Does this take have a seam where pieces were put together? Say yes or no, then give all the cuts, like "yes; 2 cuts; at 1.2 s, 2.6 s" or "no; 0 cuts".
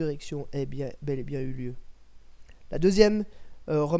no; 0 cuts